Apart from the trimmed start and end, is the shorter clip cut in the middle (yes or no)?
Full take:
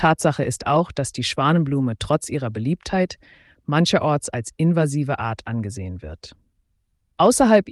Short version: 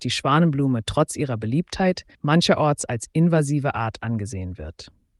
yes